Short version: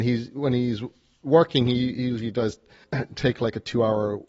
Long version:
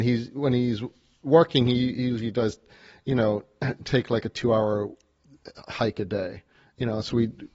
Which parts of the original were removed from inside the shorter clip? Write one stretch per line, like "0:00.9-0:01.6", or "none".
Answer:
0:02.8-0:03.5